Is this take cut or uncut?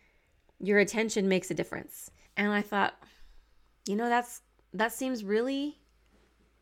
cut